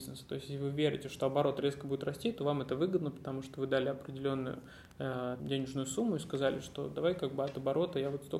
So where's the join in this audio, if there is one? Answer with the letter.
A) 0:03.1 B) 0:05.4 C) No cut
B